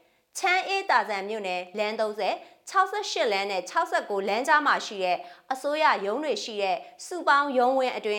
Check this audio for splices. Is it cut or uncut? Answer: uncut